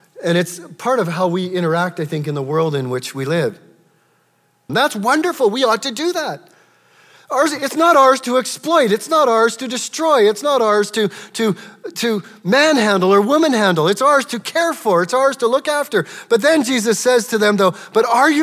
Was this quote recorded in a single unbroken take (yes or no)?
no